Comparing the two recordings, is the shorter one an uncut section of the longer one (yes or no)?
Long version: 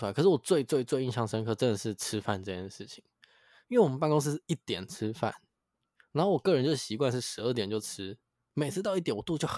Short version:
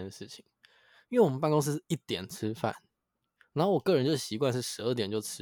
yes